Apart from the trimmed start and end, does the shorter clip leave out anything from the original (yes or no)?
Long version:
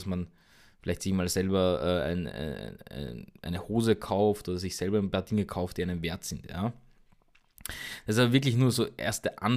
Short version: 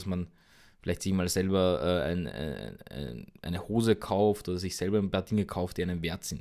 no